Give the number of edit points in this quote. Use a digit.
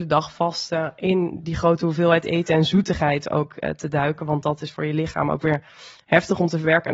0